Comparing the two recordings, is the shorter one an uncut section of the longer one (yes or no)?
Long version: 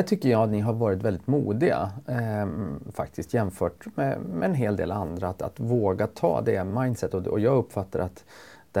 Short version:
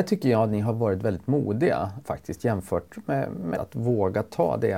no